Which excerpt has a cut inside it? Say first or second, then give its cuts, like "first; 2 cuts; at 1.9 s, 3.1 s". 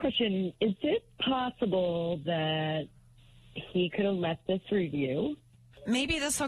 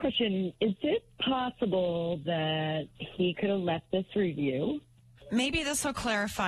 second; 1 cut; at 2.9 s